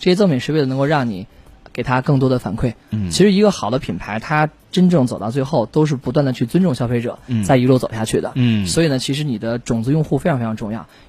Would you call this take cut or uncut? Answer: uncut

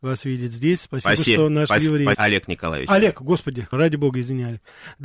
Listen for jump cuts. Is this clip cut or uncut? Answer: cut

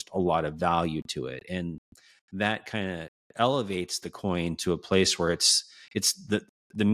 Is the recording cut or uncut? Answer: uncut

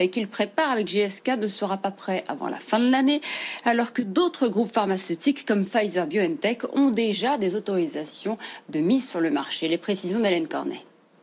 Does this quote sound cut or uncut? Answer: uncut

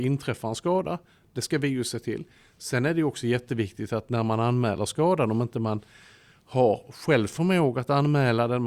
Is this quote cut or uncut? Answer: uncut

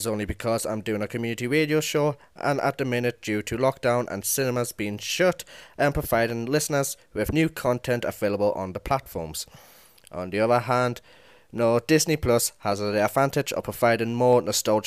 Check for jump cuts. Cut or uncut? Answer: uncut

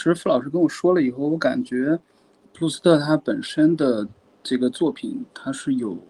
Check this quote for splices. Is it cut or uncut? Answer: uncut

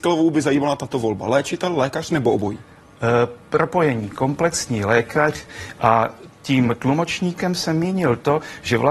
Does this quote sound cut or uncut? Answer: cut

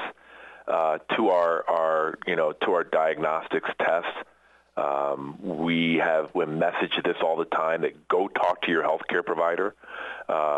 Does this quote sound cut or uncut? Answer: uncut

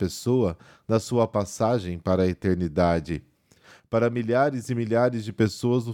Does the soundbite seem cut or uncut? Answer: uncut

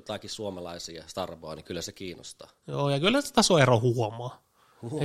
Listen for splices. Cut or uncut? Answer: uncut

